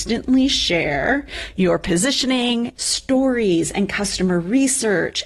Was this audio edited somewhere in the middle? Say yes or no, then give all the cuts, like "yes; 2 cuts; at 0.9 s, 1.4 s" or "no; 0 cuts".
yes; 1 cut; at 2.8 s